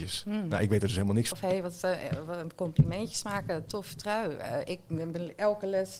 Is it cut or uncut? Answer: cut